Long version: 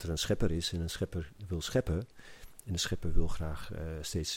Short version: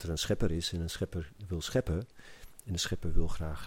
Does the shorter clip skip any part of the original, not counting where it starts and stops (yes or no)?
no